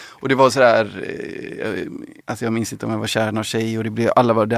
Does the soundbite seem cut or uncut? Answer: cut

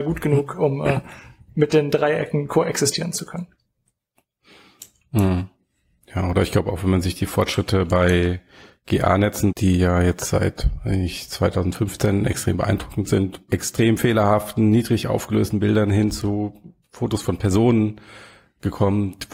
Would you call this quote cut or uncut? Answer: cut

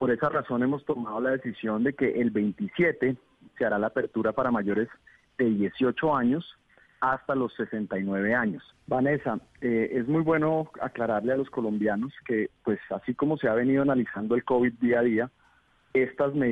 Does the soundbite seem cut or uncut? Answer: cut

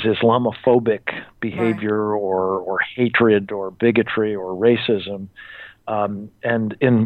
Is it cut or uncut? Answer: uncut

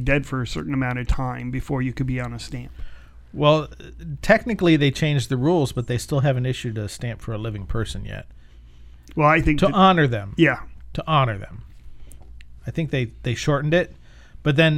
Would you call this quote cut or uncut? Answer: cut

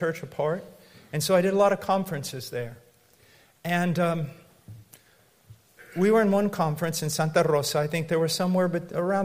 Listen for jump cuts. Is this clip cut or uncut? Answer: uncut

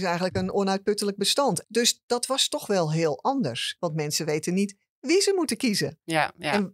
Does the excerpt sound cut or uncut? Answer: cut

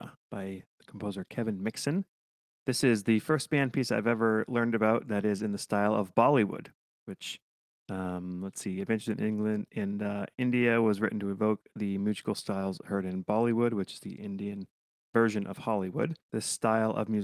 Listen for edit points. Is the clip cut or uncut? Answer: cut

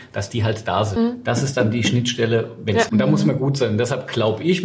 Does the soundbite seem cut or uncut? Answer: cut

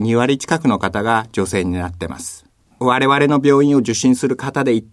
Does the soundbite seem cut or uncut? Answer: cut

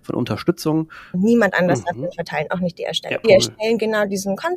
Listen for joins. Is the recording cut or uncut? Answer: cut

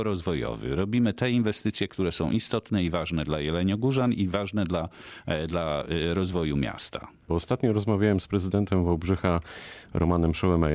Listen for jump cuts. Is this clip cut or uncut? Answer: cut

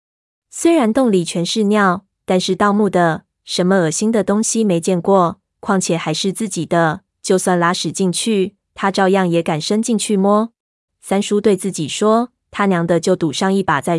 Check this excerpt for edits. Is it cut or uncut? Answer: cut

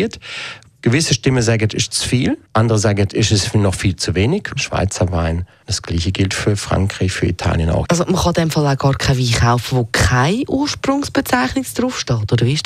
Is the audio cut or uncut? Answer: cut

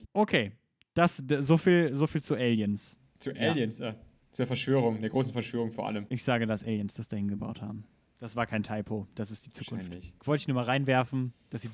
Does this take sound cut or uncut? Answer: cut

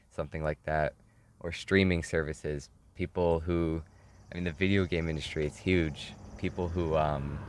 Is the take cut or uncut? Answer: uncut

